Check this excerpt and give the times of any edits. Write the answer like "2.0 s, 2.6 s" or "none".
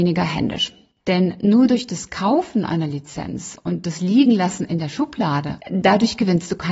1.0 s, 5.6 s